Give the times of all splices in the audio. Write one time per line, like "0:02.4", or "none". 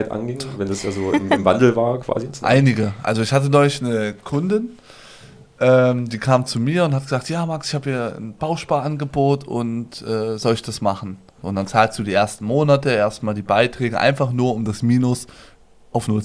0:11.4